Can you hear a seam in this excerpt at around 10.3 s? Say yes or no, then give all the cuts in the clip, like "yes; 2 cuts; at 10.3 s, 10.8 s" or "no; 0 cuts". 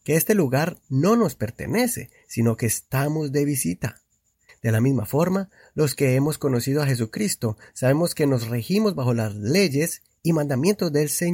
no; 1 cut; at 4.5 s